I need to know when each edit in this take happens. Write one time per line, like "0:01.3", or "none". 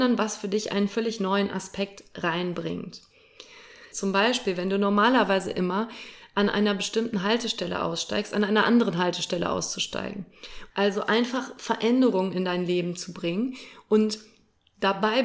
0:03.9
0:10.7